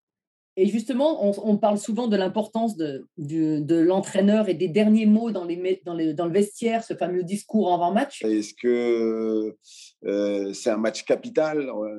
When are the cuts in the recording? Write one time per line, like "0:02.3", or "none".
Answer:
0:08.2